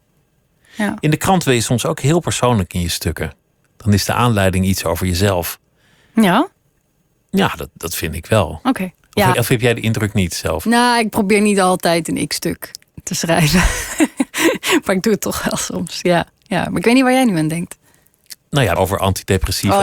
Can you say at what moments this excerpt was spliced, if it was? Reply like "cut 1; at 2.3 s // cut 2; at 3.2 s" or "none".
cut 1; at 9.3 s // cut 2; at 18.8 s